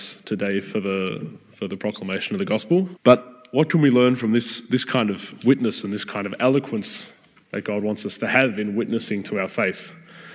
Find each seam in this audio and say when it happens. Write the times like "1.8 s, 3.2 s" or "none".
3.0 s